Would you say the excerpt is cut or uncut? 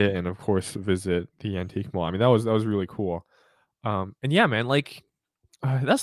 uncut